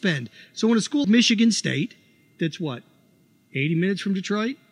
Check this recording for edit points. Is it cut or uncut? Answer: cut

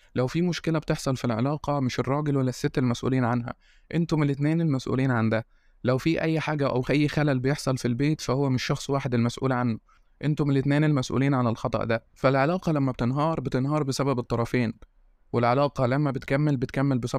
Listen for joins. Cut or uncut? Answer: uncut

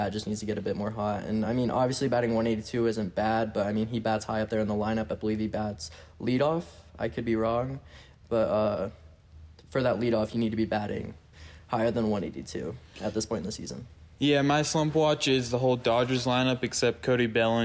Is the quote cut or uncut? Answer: uncut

